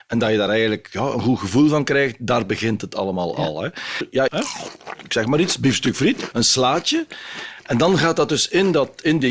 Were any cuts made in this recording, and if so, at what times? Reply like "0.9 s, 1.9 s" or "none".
4.3 s, 6.3 s